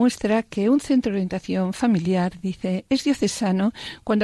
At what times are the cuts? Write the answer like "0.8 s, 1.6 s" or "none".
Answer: none

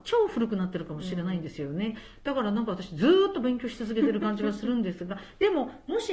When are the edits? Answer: none

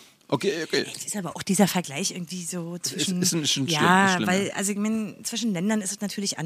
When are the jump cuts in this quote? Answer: none

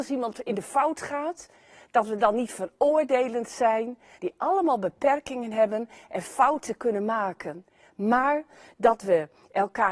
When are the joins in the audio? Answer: 4.2 s

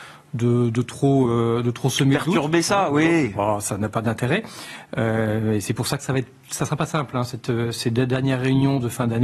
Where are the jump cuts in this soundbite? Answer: none

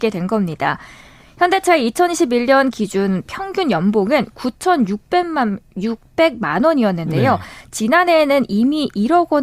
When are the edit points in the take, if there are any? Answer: none

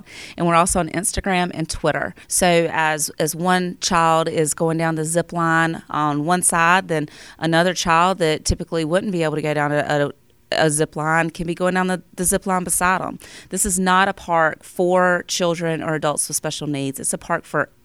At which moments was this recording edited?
2.2 s

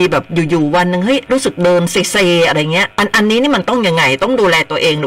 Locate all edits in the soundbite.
2.9 s

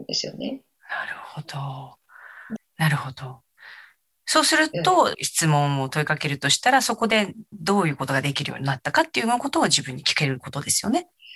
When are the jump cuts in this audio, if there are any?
2.6 s, 5.1 s

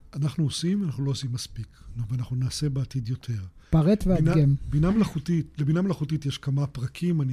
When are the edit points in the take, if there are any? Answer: none

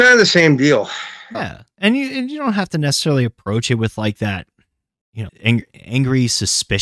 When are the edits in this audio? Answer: 1.3 s, 5.3 s

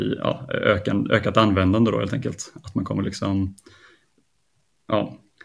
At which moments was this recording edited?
none

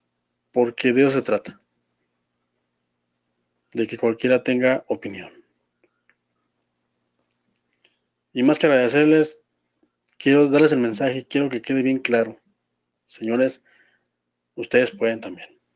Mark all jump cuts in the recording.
none

